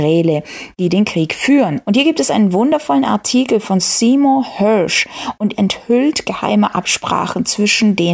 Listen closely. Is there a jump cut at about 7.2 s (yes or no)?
no